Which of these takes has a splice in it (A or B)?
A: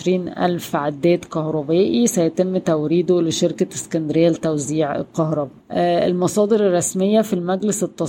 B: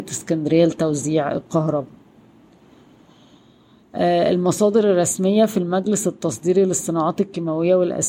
A